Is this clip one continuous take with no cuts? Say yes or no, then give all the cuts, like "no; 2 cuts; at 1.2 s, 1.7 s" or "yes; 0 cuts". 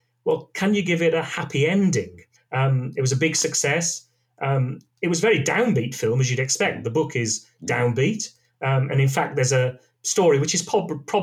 no; 1 cut; at 2.4 s